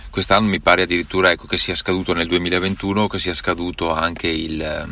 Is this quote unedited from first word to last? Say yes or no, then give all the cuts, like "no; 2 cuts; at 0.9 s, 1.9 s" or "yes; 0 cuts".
yes; 0 cuts